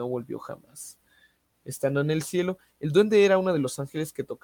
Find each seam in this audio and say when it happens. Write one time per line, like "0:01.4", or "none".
0:01.5